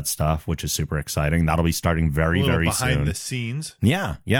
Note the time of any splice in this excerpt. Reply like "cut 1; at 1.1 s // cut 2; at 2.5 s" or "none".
none